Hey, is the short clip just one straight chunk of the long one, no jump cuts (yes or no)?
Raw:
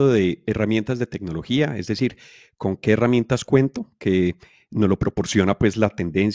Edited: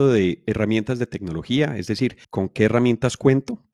no